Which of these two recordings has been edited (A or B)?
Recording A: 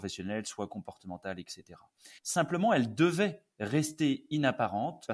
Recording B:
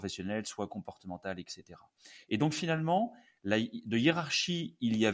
A